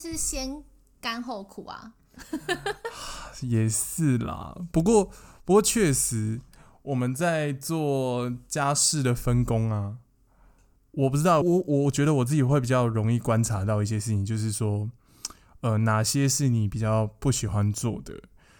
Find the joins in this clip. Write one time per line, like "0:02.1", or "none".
0:11.4

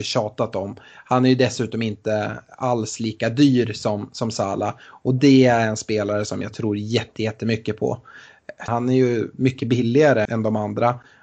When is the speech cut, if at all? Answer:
0:08.7
0:10.3

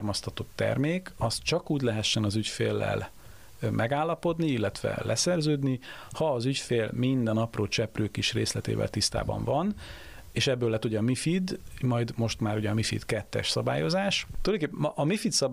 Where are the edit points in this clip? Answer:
none

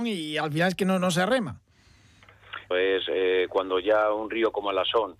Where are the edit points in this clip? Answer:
0:02.7

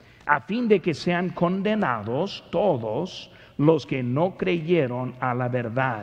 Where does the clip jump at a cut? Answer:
none

